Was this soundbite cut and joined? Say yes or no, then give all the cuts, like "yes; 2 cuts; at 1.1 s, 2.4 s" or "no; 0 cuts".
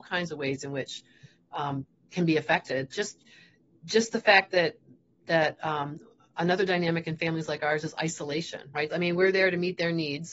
yes; 2 cuts; at 1.9 s, 8.9 s